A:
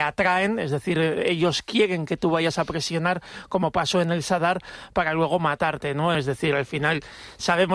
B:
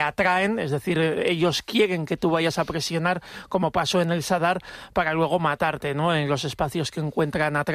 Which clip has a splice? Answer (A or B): A